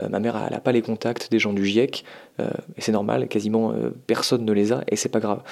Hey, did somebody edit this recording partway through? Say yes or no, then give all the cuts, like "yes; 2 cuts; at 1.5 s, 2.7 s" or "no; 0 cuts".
no; 0 cuts